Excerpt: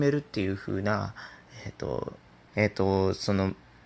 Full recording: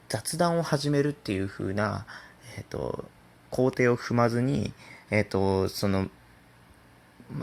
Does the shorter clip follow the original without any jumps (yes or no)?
no